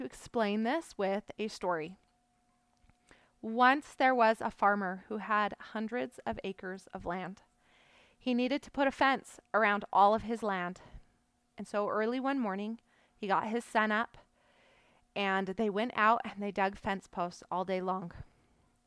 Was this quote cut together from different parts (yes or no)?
no